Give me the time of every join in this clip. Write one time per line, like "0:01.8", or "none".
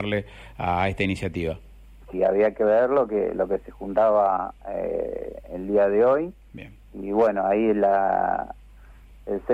0:02.1